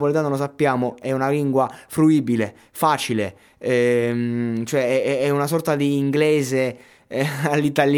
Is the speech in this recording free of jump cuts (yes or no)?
yes